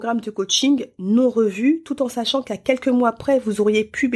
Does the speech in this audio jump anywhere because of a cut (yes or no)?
no